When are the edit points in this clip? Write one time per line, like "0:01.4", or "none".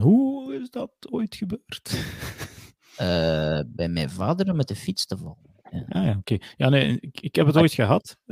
none